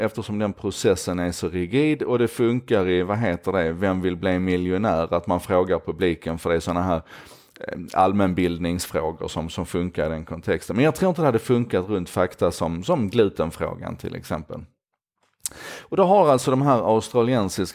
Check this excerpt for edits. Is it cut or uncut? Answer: uncut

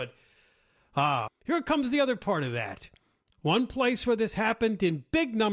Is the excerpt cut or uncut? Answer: cut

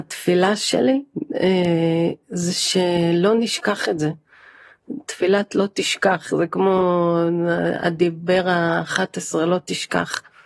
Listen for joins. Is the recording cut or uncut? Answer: uncut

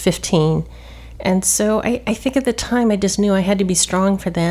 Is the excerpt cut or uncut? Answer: uncut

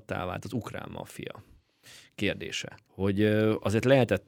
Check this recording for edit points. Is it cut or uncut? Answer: cut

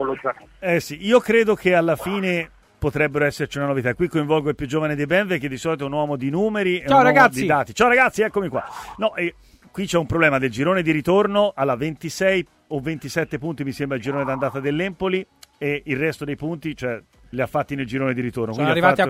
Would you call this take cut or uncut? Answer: cut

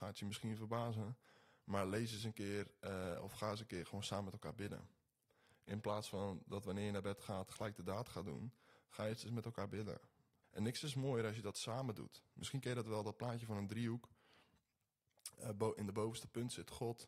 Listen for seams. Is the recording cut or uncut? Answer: cut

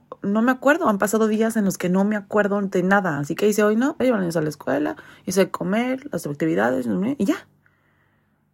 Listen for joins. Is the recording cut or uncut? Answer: cut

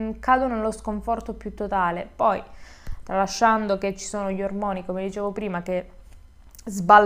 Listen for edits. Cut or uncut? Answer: uncut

